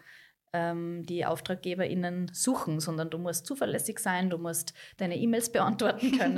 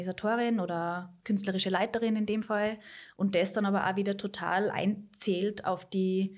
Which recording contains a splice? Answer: first; 1 cut; at 4.3 s

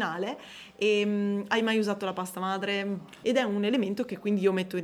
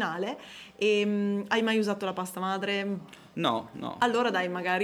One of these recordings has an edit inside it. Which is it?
first; 1 cut; at 3.2 s

